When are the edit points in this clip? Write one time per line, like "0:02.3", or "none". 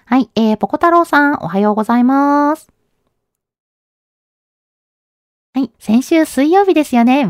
0:05.7

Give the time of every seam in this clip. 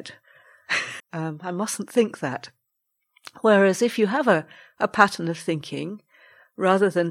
0:01.0

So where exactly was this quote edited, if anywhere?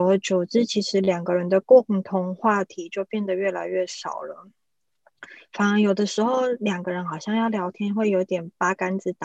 none

